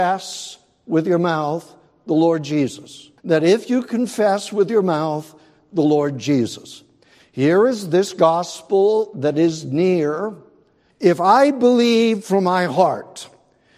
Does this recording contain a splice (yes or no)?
yes